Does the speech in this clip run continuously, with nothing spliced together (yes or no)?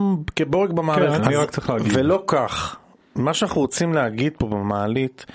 no